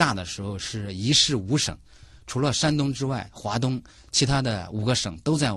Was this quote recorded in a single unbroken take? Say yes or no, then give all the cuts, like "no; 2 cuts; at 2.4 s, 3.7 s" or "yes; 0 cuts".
yes; 0 cuts